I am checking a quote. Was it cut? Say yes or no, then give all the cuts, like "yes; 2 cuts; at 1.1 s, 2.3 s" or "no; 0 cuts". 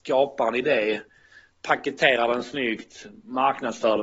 no; 0 cuts